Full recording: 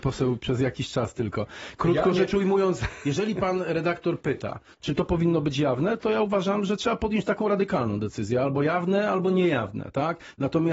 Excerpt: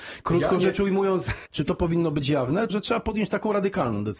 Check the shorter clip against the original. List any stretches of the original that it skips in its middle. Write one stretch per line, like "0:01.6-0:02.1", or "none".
0:03.0-0:04.8
0:06.0-0:06.7